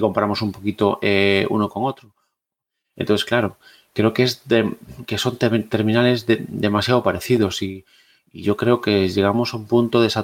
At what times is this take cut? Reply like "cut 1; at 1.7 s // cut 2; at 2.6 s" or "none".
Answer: none